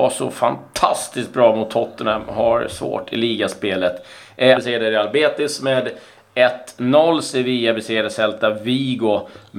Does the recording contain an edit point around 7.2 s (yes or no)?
no